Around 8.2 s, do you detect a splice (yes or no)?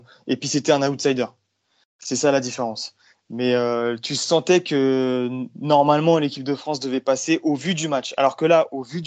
no